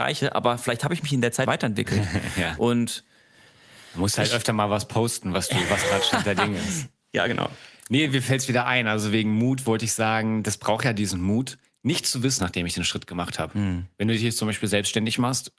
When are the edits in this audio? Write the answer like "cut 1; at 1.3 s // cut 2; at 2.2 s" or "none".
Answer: cut 1; at 1.5 s // cut 2; at 12.4 s